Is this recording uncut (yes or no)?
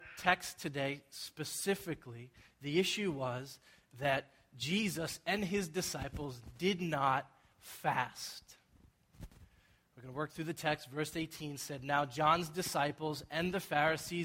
yes